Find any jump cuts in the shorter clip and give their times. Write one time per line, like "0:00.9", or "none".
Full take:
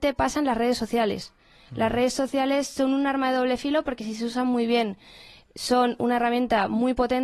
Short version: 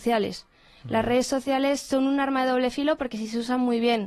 none